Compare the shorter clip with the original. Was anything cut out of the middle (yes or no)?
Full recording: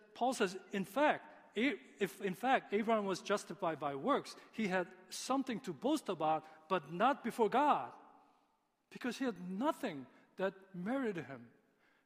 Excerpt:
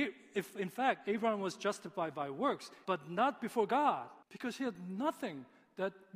yes